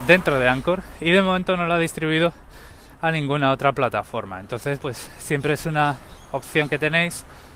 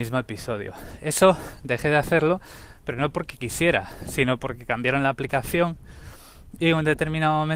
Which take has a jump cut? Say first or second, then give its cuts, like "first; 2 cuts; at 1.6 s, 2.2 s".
first; 1 cut; at 4.8 s